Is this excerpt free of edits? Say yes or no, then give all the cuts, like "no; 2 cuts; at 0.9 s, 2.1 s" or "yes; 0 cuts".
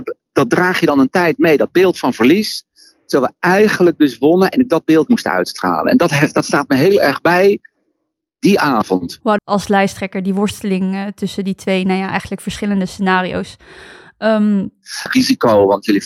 no; 2 cuts; at 9.4 s, 15.1 s